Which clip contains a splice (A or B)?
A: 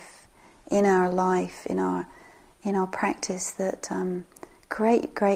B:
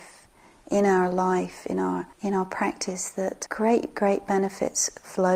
B